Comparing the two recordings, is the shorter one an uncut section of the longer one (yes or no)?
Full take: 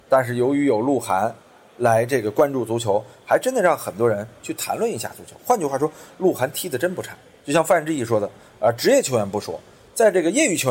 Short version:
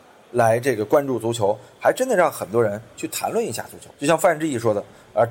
no